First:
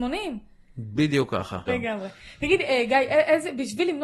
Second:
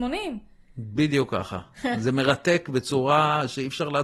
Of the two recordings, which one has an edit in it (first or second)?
first